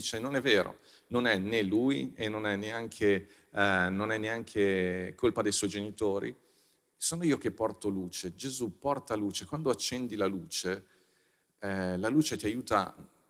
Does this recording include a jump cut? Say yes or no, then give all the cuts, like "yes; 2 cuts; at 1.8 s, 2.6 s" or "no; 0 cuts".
no; 0 cuts